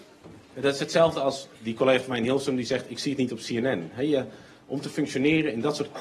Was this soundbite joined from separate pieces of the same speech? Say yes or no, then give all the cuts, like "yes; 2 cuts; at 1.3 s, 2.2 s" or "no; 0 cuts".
yes; 1 cut; at 1.5 s